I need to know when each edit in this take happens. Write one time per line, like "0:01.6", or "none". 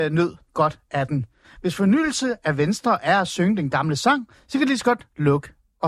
none